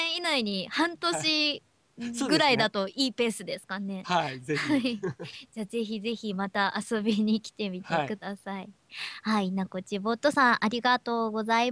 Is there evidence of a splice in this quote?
no; 0 cuts

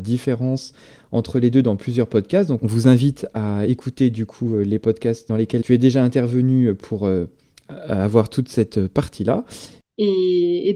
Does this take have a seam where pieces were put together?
yes; 1 cut; at 9.8 s

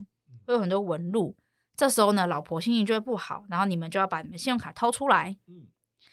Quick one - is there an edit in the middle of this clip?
no; 0 cuts

